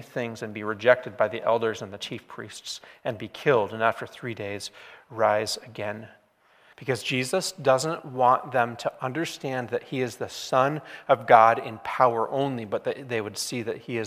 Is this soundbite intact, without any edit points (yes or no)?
no